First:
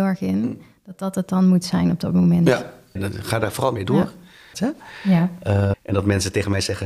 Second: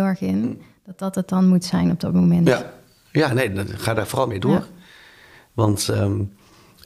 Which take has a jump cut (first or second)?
first